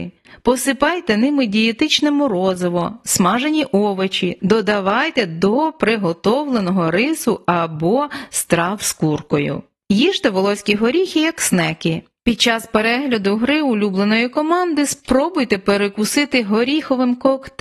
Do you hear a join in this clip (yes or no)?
yes